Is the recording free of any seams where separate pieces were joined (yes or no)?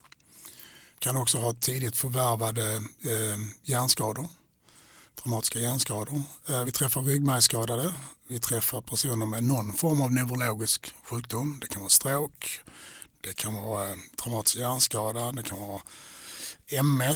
yes